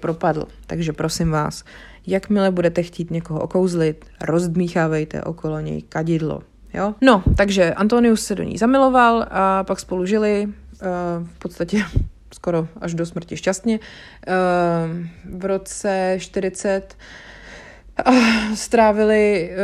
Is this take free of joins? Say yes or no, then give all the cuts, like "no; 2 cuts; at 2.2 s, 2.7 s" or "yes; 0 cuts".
no; 1 cut; at 7.0 s